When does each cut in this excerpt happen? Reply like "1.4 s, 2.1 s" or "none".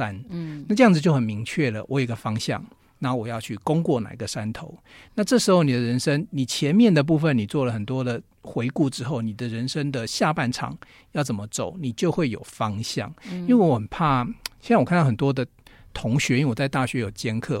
none

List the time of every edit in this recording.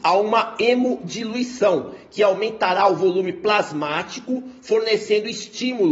none

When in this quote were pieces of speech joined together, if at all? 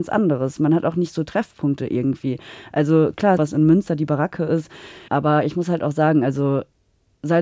3.4 s, 5.1 s

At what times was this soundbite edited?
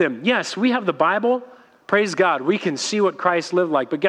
none

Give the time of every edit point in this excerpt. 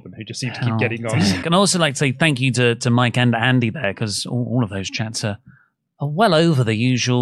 1.4 s

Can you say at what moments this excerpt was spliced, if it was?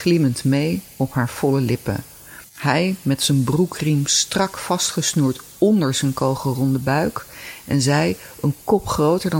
2.4 s

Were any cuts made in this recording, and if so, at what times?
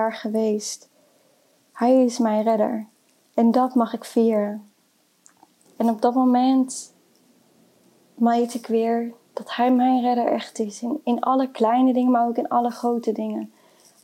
5.7 s

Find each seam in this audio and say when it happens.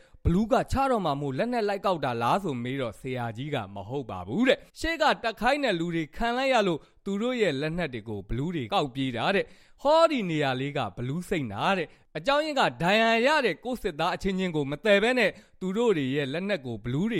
4.7 s, 8.7 s

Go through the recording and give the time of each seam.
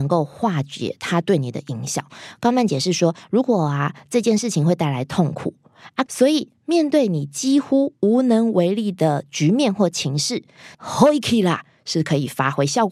6.1 s, 10.7 s

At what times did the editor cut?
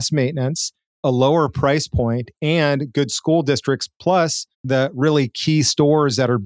4.5 s

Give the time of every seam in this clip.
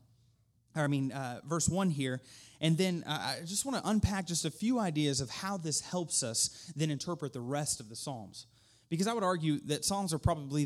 none

